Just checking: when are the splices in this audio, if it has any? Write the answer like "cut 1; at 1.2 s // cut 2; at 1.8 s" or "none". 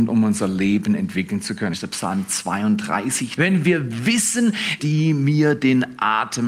cut 1; at 1.7 s // cut 2; at 3.4 s // cut 3; at 4.8 s